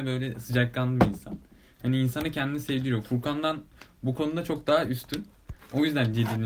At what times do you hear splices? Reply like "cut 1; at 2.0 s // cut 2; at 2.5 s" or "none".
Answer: none

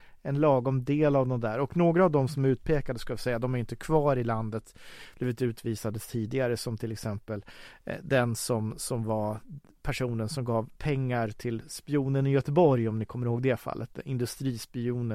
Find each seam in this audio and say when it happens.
none

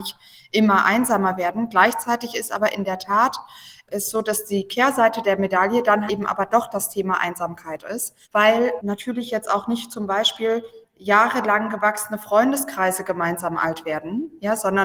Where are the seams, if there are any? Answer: cut 1; at 6.1 s // cut 2; at 8.2 s

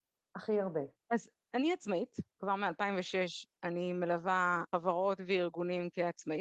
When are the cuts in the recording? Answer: cut 1; at 1.0 s // cut 2; at 2.3 s

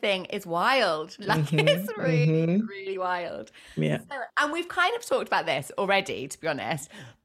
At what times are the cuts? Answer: none

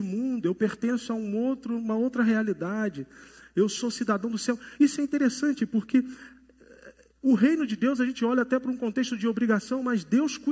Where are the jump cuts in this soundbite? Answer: none

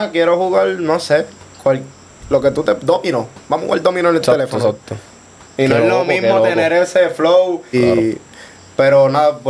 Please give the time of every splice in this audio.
cut 1; at 7.7 s

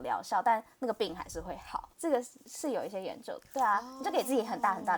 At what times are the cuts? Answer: cut 1; at 1.9 s

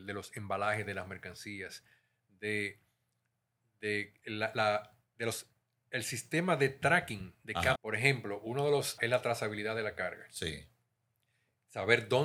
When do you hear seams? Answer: cut 1; at 7.8 s // cut 2; at 9.0 s

